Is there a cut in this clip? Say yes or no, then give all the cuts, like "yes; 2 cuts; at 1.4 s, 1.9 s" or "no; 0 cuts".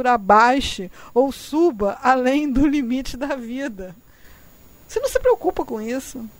no; 0 cuts